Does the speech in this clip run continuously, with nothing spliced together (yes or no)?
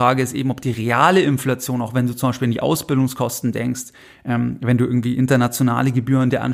yes